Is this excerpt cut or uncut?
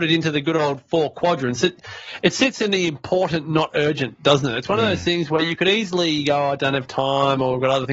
uncut